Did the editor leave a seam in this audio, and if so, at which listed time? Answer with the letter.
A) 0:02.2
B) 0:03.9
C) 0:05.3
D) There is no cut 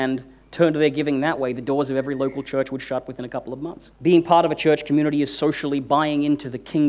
B